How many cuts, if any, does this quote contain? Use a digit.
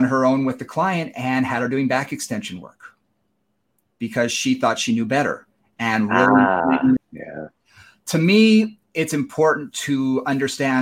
1